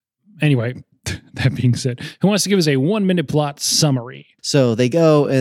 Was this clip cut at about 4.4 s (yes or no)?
yes